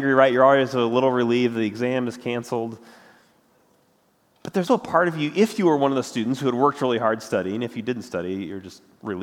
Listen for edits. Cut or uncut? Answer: cut